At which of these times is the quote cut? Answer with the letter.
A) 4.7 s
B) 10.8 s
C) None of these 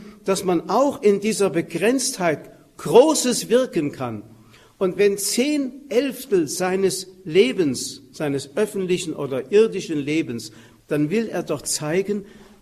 B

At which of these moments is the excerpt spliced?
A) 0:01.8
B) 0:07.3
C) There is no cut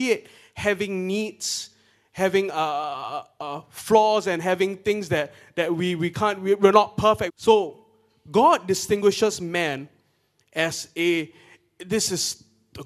B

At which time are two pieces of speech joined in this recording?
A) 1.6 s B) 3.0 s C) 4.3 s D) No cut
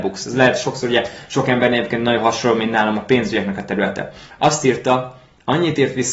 C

